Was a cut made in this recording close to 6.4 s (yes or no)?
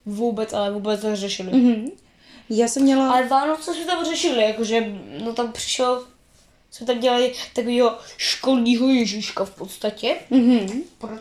no